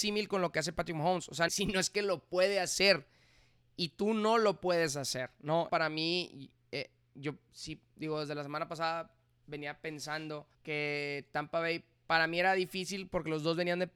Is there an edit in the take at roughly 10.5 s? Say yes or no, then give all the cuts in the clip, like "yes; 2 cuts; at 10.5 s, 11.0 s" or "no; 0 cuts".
yes; 3 cuts; at 1.5 s, 5.7 s, 10.5 s